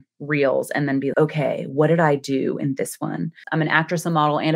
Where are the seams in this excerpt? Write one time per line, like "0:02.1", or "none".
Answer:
0:01.1
0:03.4